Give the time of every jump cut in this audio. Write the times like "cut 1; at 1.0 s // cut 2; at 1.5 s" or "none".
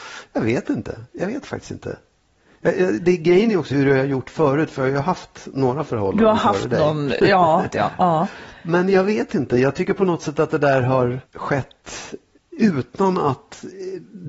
cut 1; at 3.7 s // cut 2; at 7.7 s // cut 3; at 11.3 s